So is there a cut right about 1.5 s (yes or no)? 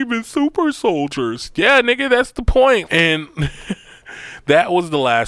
no